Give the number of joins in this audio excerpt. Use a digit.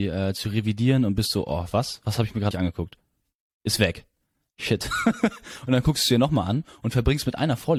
1